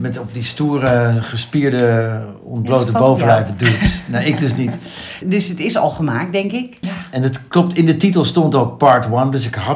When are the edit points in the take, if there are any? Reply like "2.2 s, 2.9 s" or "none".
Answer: 5.2 s, 6.8 s